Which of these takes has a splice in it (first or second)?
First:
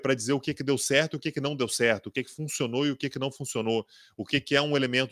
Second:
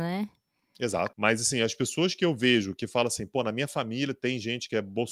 second